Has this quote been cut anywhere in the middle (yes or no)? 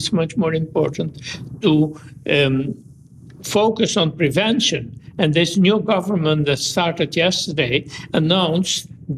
no